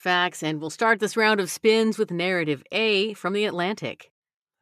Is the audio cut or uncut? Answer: uncut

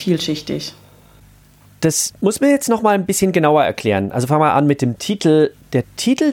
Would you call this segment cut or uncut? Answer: uncut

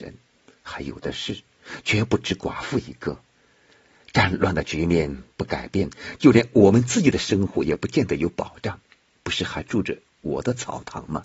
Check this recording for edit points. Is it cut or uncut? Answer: cut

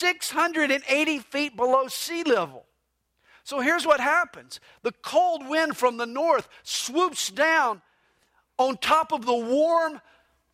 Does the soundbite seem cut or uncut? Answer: uncut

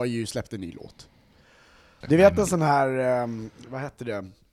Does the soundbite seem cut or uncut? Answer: cut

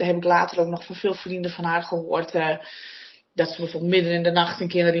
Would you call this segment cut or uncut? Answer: uncut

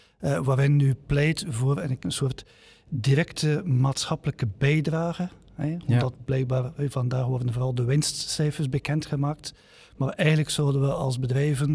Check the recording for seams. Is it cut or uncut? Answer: cut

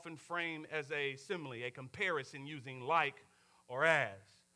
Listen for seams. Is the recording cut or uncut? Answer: uncut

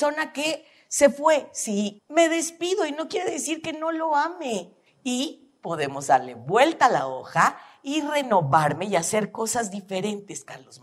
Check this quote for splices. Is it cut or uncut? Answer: cut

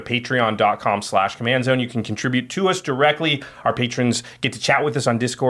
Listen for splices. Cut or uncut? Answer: uncut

